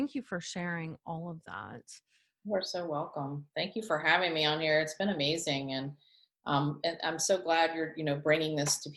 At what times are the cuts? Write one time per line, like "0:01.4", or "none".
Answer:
none